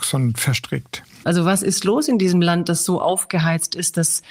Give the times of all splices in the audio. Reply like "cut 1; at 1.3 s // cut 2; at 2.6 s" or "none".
cut 1; at 1.2 s